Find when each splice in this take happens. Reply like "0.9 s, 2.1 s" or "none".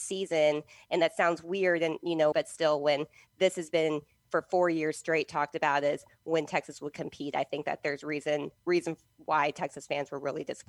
2.3 s